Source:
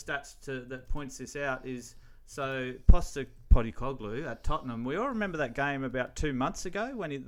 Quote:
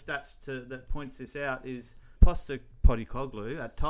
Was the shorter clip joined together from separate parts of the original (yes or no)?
yes